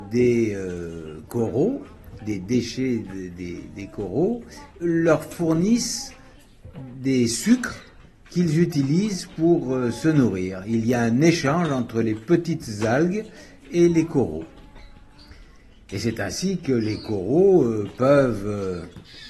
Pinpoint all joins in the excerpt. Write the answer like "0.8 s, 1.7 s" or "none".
4.8 s